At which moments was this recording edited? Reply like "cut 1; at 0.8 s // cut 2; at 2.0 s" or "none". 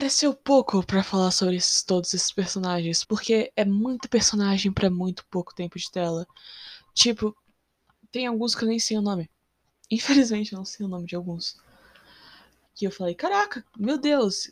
cut 1; at 3.0 s // cut 2; at 12.7 s